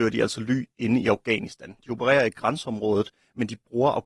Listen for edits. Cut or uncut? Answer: uncut